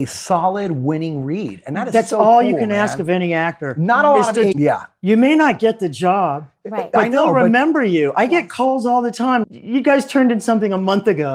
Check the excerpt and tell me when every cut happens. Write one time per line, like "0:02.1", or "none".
0:04.5
0:09.4

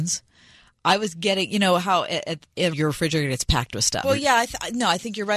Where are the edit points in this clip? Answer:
0:02.7
0:04.0

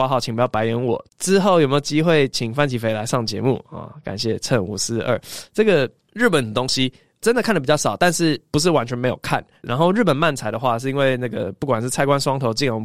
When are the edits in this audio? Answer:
0:01.1
0:09.6

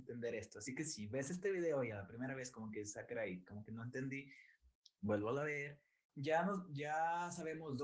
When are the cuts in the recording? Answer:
0:06.1

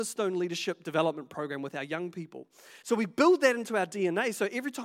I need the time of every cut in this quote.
0:02.8

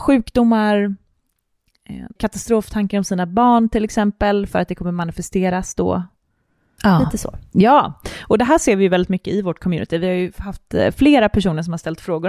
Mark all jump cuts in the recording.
0:02.2
0:06.8

